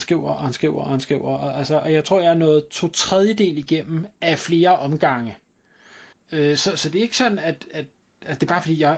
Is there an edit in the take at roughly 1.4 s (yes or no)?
no